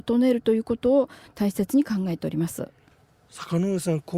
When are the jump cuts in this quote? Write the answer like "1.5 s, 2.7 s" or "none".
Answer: none